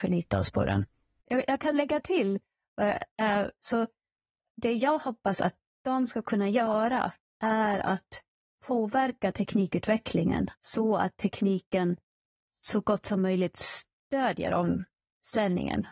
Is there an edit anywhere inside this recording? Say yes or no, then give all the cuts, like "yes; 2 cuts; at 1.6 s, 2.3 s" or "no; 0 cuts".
yes; 3 cuts; at 1.2 s, 3.6 s, 10.6 s